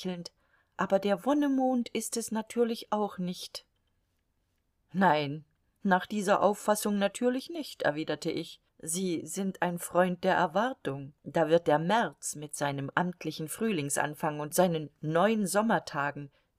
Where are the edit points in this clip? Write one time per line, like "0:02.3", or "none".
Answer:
0:08.7
0:11.2